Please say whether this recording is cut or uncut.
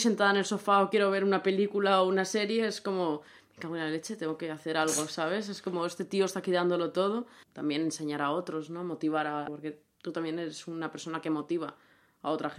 cut